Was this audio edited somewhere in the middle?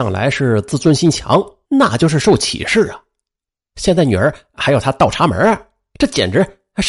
yes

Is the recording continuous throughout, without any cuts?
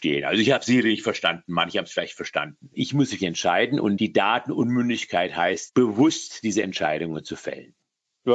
no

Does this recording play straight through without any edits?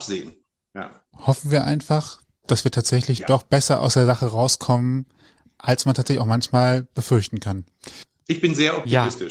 yes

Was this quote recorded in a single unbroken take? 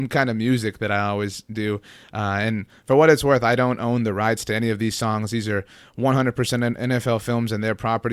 yes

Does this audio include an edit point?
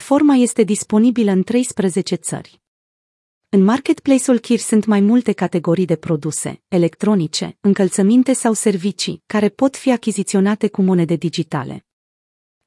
no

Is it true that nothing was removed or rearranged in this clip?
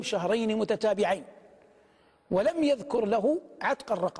yes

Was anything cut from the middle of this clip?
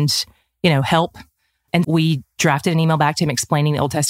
yes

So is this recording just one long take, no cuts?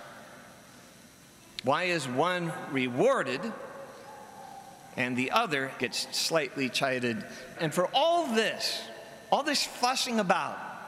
no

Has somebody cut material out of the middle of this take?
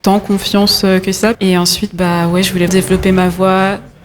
yes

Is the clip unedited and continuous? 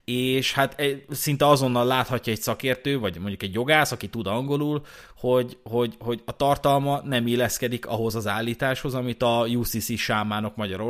yes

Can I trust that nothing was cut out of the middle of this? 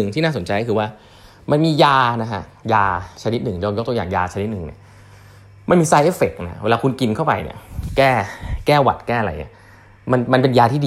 yes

